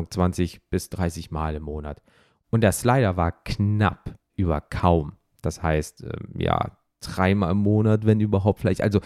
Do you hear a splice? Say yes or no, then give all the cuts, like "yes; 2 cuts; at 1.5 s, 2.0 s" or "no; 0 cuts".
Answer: no; 0 cuts